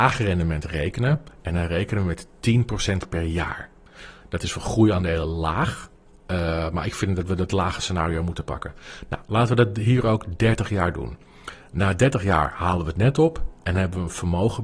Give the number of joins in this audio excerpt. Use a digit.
0